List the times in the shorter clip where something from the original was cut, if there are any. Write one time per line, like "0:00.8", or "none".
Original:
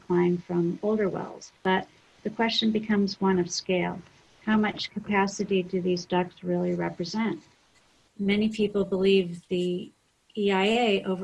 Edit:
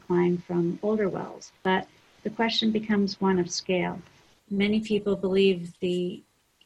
0:04.3